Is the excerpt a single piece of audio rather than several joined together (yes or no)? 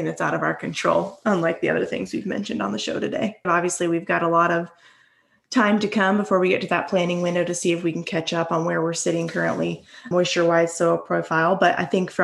no